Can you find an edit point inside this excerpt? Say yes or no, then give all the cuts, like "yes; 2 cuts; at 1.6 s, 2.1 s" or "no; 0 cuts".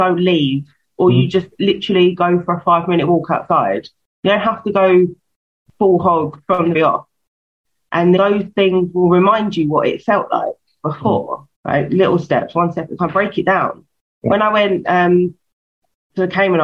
yes; 3 cuts; at 6.7 s, 8.2 s, 11.5 s